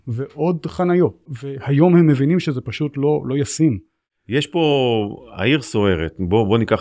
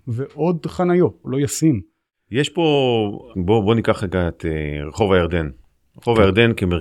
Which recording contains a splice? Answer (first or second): second